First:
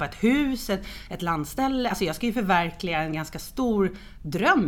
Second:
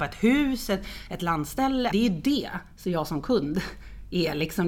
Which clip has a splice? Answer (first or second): second